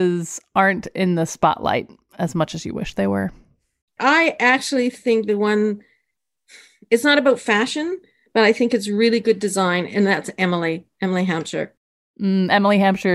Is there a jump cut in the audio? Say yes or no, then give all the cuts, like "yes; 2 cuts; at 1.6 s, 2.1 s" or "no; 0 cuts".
no; 0 cuts